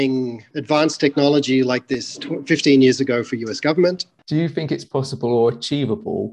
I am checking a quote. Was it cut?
yes; 1 cut; at 4.2 s

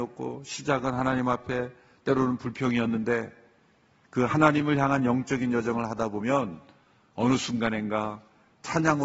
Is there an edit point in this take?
no; 0 cuts

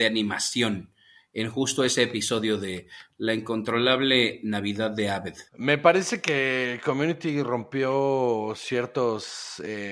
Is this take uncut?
no; 1 cut; at 5.5 s

